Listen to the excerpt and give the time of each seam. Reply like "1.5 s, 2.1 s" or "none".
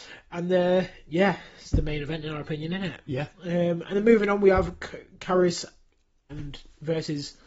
6.3 s